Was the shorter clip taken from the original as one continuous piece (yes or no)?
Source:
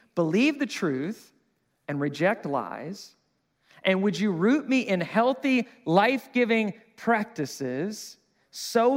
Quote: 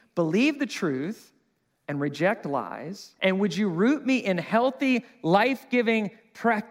no